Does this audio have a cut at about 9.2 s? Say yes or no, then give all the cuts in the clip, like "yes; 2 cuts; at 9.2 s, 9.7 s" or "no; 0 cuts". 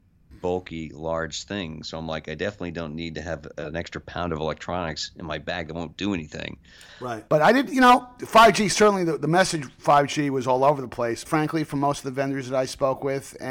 no; 2 cuts; at 7.3 s, 11.3 s